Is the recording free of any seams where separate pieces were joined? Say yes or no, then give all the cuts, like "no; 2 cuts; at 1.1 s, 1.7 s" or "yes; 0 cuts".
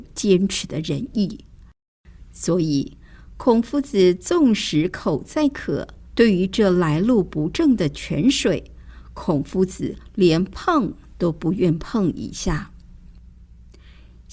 no; 1 cut; at 6.1 s